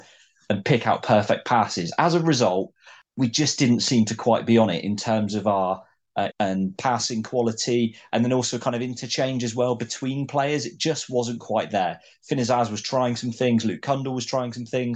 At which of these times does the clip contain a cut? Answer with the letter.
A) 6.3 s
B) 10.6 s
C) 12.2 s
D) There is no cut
A